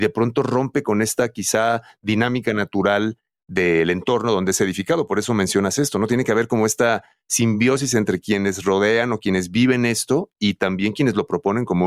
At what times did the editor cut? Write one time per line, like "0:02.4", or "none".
none